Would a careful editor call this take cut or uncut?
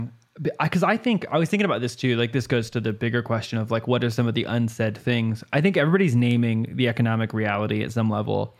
uncut